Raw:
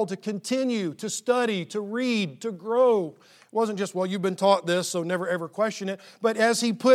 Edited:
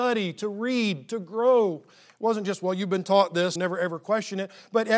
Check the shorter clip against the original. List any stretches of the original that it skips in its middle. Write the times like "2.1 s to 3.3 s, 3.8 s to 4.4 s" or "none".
4.9 s to 5.0 s